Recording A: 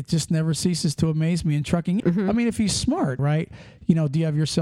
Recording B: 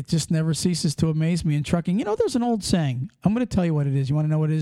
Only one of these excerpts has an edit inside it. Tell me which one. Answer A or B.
A